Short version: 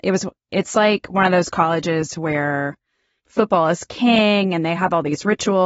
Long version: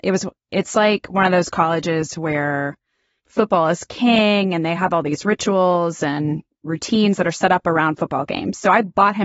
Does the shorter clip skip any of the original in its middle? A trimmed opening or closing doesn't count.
no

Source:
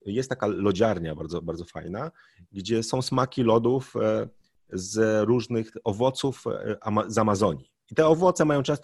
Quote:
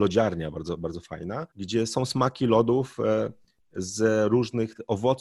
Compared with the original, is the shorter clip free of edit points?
no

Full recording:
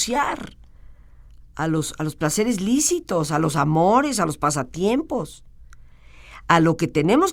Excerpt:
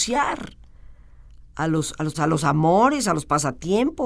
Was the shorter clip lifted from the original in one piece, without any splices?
no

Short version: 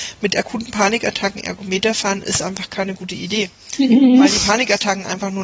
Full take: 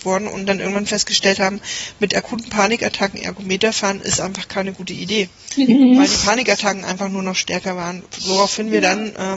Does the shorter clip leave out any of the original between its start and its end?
no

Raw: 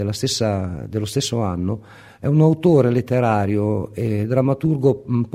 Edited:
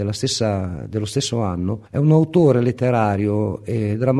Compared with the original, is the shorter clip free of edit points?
no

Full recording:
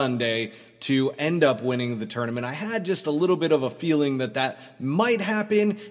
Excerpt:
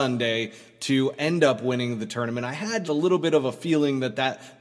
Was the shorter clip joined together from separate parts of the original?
yes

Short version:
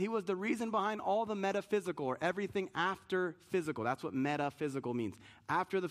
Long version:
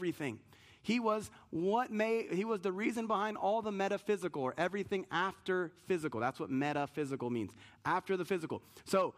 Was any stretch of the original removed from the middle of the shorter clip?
no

